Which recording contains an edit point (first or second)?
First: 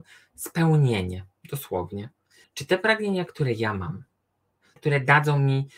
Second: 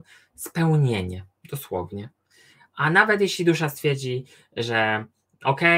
first